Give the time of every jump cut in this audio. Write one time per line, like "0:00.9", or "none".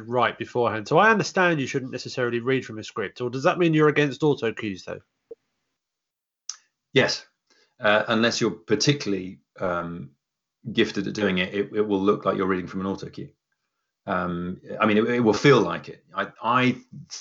none